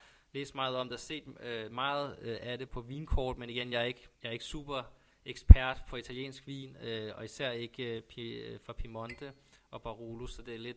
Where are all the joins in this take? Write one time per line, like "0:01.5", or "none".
0:02.7
0:04.1